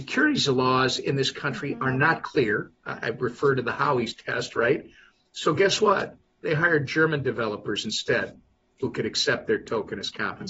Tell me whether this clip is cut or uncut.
uncut